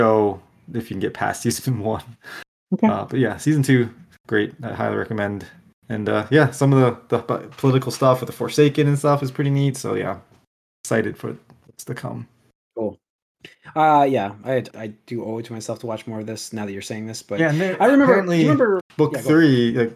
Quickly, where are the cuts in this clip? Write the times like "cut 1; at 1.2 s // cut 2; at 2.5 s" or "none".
cut 1; at 14.7 s // cut 2; at 18.8 s